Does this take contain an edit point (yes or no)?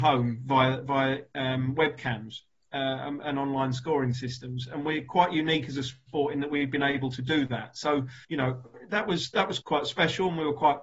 yes